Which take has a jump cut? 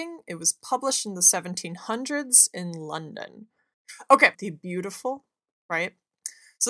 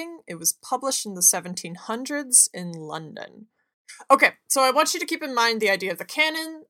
first; 1 cut; at 4.3 s

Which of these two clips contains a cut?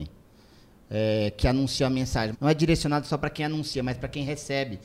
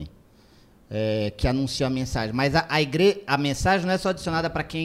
first; 1 cut; at 2.3 s

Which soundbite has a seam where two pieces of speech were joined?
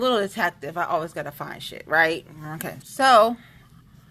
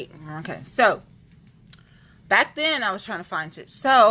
first; 1 cut; at 2.8 s

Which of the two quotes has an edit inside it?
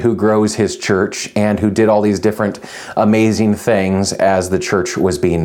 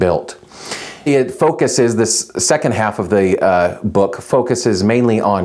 second; 1 cut; at 1.1 s

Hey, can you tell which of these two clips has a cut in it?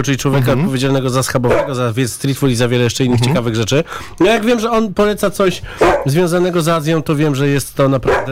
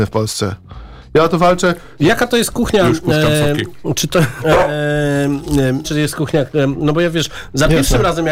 second; 3 cuts; at 2.0 s, 4.4 s, 5.8 s

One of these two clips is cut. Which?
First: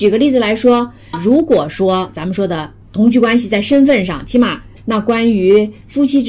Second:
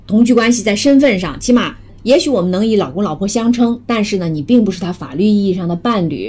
first; 1 cut; at 4.8 s

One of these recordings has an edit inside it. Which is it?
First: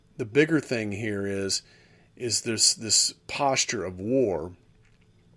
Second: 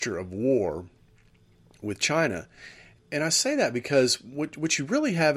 second; 1 cut; at 3.0 s

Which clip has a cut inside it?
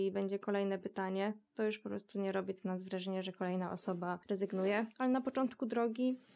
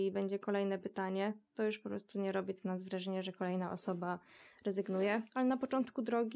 first; 1 cut; at 4.2 s

